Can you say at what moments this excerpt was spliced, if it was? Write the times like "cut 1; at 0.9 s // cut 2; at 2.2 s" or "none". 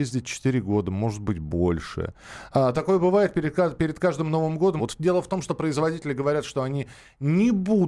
cut 1; at 4.8 s